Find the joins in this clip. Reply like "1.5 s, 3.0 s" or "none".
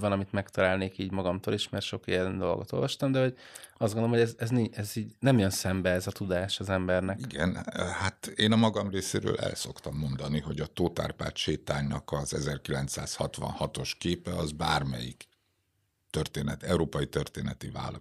none